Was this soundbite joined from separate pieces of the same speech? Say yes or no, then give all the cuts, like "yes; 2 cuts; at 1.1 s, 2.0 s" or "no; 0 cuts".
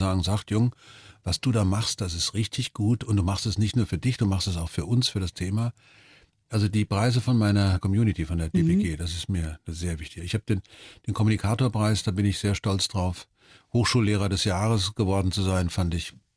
no; 0 cuts